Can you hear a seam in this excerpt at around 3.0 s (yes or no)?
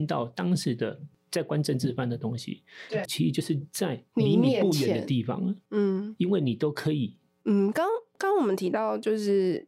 yes